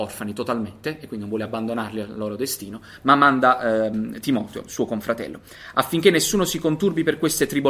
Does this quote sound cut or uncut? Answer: uncut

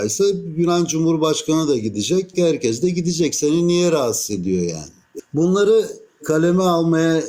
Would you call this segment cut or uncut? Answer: cut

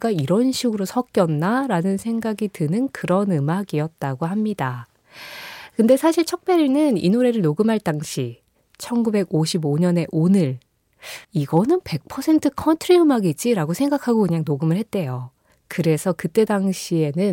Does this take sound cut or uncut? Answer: cut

